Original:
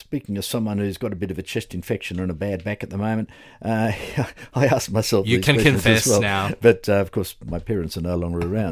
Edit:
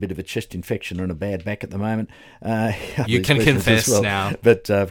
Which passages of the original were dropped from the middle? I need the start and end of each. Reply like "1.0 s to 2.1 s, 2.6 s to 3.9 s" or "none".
4.2 s to 5.2 s